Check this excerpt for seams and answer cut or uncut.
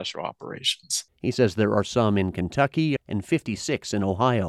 cut